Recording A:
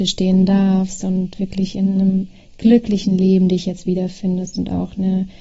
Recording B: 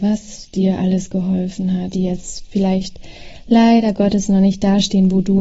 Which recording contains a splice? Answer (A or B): B